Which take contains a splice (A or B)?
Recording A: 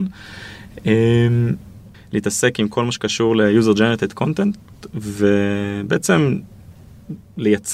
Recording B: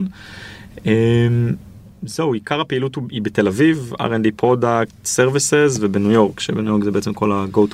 A